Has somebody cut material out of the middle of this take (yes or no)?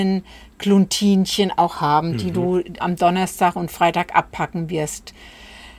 yes